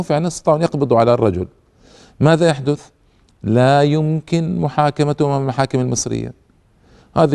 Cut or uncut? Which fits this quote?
uncut